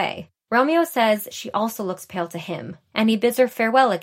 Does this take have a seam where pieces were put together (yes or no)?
no